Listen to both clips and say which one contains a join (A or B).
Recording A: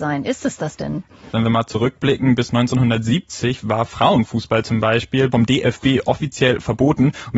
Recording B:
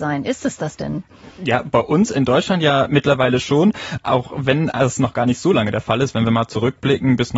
A